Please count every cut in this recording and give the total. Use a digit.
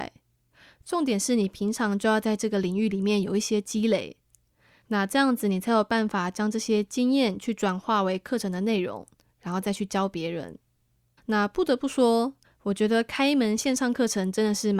2